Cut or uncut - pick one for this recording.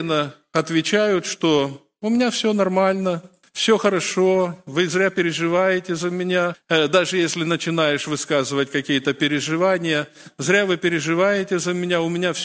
uncut